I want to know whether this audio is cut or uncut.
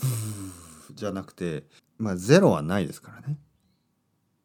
cut